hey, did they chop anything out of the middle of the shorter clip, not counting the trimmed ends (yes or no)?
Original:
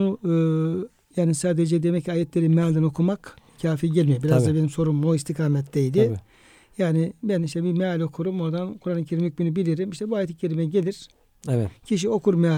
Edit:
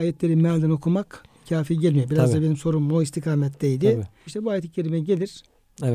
yes